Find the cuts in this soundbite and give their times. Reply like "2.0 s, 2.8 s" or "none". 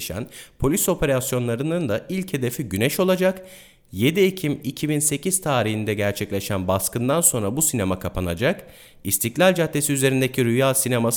none